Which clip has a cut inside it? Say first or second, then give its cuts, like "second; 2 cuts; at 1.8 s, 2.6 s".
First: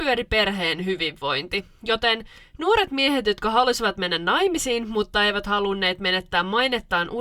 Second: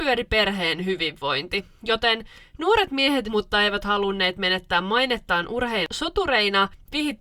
second; 1 cut; at 3.2 s